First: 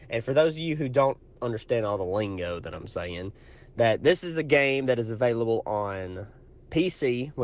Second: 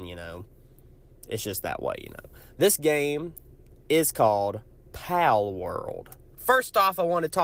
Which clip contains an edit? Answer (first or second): second